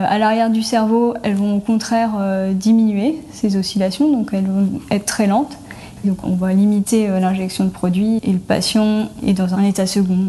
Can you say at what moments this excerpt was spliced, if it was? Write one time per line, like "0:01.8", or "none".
0:06.0